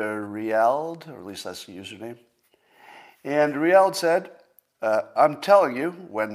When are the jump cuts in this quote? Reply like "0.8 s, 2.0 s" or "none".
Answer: none